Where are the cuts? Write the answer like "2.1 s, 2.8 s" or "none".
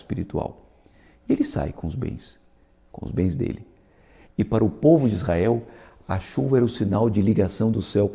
4.2 s